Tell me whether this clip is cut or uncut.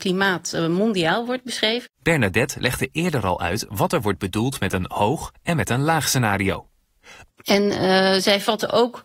cut